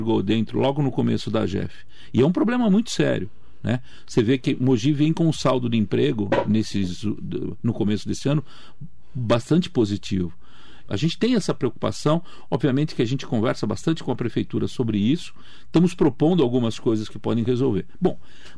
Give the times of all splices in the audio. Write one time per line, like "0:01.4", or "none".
0:10.9